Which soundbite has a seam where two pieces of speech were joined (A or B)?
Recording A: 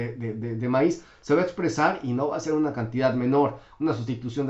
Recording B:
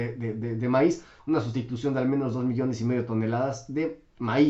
B